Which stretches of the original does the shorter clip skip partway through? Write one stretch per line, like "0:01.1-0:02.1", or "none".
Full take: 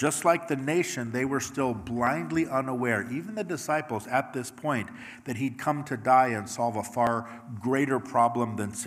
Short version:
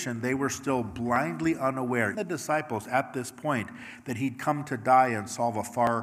0:03.1-0:03.3